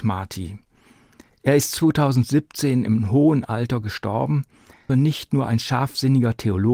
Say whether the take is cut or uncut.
cut